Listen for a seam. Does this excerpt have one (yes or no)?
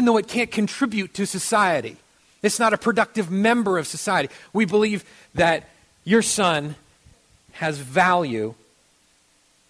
yes